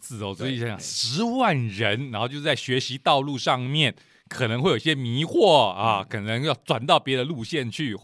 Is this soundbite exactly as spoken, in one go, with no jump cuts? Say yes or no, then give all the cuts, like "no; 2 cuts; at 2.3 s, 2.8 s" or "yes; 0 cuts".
yes; 0 cuts